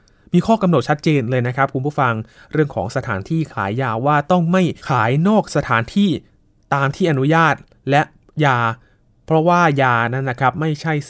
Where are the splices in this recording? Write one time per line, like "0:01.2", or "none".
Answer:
0:04.8